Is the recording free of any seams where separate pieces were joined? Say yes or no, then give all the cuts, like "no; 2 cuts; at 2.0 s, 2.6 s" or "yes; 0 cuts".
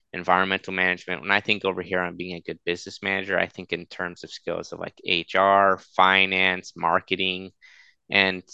yes; 0 cuts